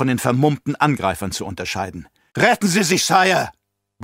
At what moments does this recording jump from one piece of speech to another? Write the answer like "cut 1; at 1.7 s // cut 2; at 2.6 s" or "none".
cut 1; at 2.3 s